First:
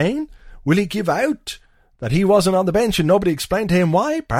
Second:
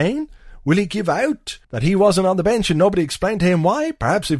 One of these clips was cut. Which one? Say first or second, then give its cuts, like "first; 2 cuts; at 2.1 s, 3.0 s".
second; 1 cut; at 1.6 s